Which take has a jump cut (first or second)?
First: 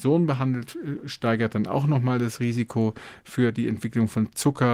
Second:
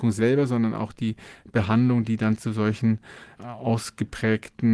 second